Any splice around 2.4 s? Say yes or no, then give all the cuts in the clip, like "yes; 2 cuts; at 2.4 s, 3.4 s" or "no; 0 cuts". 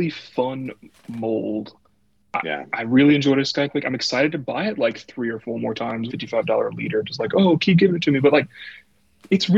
no; 1 cut; at 6.1 s